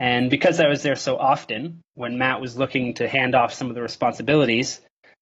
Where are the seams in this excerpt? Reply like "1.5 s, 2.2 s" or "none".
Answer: none